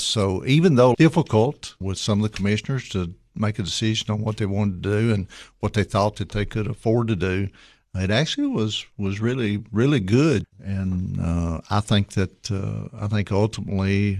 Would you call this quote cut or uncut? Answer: cut